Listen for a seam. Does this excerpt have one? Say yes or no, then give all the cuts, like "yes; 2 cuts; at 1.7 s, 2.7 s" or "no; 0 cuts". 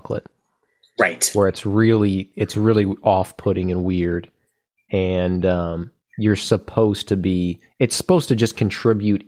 no; 0 cuts